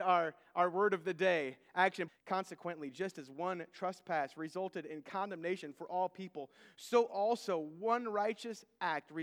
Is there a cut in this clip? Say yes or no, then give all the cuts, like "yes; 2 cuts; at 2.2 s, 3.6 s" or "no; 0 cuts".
yes; 1 cut; at 2.1 s